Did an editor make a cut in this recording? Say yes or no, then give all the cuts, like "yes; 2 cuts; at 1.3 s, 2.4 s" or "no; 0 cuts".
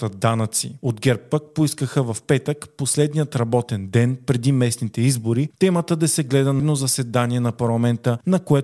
yes; 1 cut; at 6.6 s